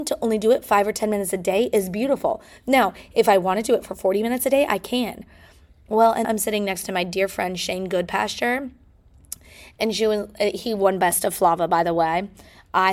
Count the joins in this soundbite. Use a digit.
1